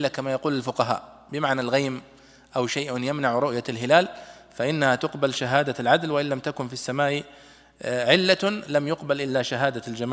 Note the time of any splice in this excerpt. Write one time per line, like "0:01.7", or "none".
none